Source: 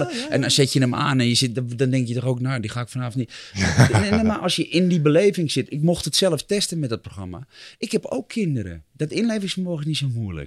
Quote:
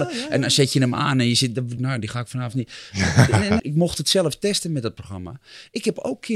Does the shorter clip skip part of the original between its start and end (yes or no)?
yes